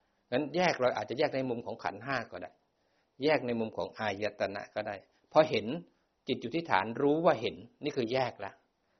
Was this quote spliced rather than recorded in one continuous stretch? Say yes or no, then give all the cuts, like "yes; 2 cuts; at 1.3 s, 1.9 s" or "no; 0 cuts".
no; 0 cuts